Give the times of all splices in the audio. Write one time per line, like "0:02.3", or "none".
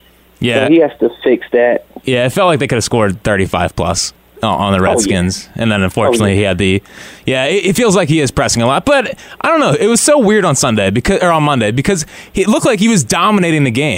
none